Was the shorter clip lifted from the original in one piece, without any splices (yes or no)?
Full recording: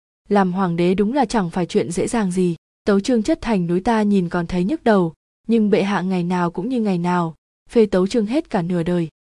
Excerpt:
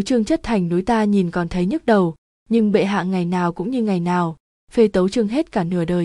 yes